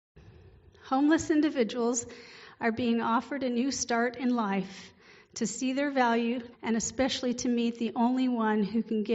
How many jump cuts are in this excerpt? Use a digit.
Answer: 1